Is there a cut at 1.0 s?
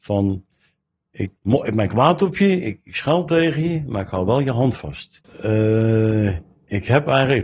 no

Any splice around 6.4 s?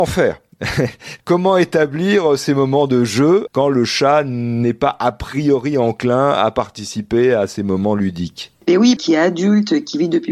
no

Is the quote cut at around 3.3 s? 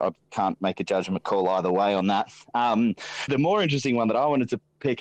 yes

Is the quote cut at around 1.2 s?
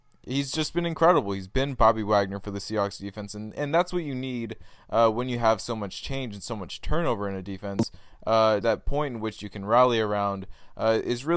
no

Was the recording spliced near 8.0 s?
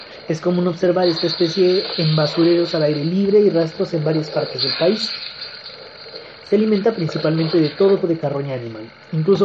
yes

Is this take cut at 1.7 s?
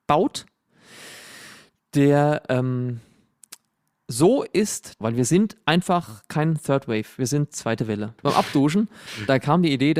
no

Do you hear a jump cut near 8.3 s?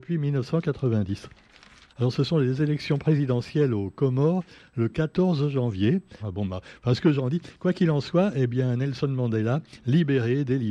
no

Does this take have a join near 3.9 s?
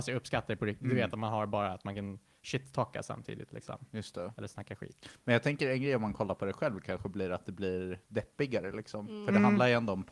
no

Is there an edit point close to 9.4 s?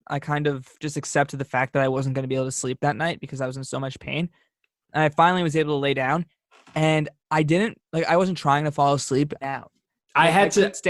yes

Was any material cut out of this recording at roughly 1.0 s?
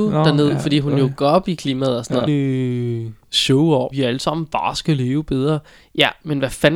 no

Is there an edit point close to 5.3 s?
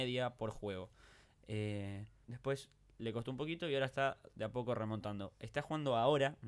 no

